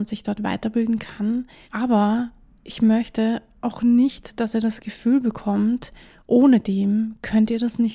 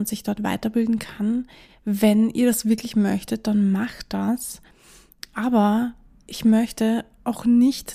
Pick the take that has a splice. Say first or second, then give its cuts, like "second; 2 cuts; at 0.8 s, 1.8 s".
first; 1 cut; at 1.7 s